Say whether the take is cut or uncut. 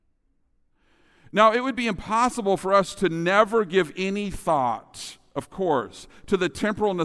uncut